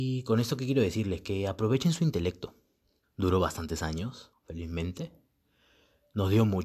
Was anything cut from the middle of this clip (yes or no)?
yes